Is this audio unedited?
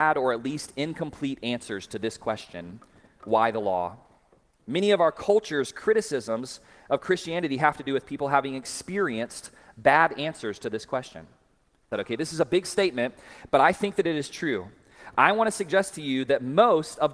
no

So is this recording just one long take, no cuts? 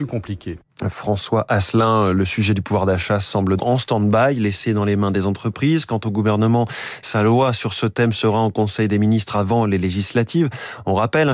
no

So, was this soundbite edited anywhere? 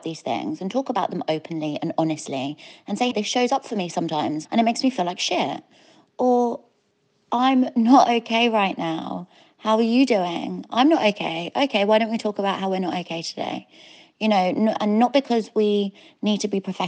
yes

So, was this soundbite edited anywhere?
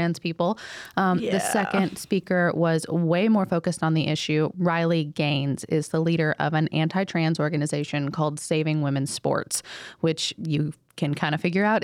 no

